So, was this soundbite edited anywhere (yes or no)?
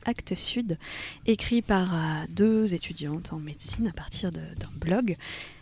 yes